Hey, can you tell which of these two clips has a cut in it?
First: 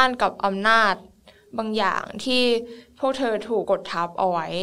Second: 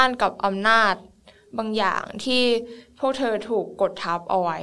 first; 1 cut; at 3.6 s

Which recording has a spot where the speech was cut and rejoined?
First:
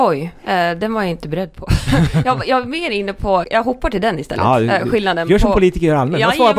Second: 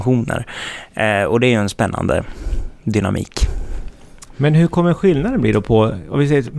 first; 1 cut; at 3.4 s

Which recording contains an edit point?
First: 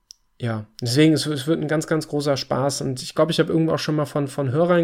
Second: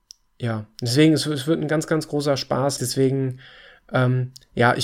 second; 1 cut; at 2.8 s

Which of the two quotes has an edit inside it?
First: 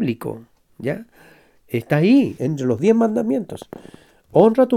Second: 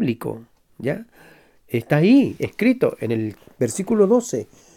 first; 1 cut; at 2.4 s

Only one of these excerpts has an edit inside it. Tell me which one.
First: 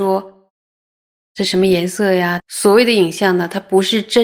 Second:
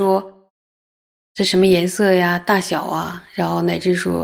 first; 1 cut; at 2.4 s

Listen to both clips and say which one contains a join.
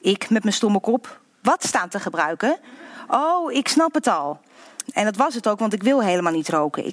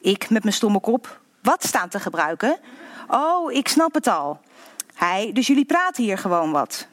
first; 1 cut; at 4.9 s

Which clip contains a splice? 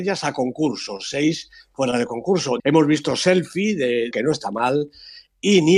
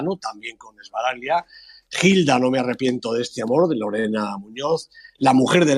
first; 2 cuts; at 2.6 s, 4.1 s

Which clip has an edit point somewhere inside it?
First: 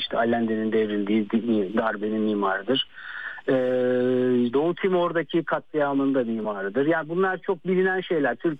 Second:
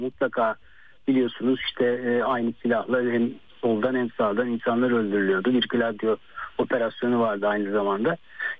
first; 1 cut; at 4.5 s

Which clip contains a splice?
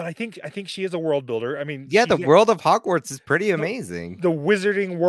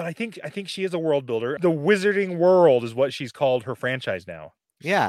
second; 1 cut; at 1.6 s

